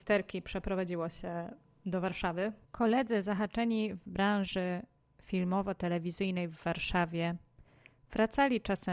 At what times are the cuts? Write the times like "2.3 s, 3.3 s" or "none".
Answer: 2.6 s